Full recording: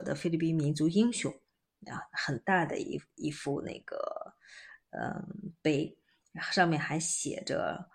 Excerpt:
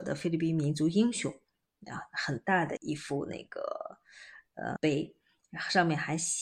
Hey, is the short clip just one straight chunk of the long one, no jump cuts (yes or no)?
no